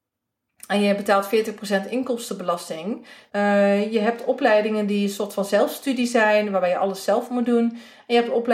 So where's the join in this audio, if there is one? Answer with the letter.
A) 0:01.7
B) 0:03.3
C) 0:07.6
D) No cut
B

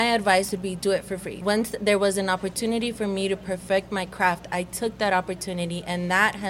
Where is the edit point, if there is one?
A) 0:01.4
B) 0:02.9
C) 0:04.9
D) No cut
A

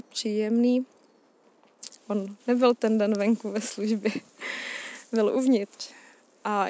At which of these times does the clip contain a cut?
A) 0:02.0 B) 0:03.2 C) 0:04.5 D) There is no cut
A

